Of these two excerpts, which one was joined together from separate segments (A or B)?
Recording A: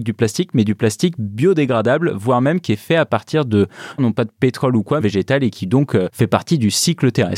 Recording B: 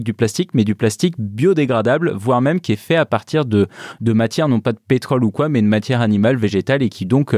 A